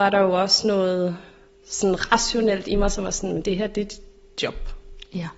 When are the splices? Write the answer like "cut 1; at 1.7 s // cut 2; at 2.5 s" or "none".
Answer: none